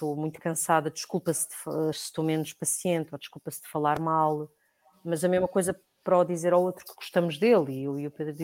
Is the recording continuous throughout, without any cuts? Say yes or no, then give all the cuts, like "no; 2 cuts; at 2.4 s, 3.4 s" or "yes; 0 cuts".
no; 1 cut; at 1.9 s